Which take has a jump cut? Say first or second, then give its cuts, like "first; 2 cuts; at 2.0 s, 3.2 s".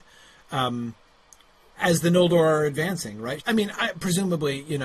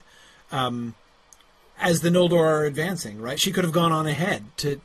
first; 1 cut; at 3.4 s